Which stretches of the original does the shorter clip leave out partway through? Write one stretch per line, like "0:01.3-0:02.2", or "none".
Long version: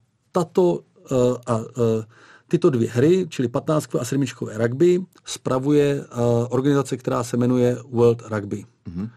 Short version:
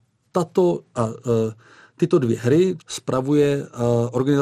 0:00.9-0:01.4
0:03.3-0:05.2